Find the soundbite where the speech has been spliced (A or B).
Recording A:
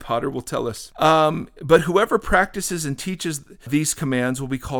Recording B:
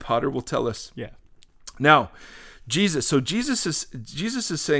A